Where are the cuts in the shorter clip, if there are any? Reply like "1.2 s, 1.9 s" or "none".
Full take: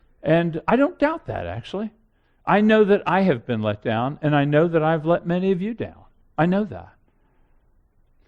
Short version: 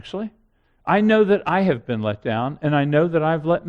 none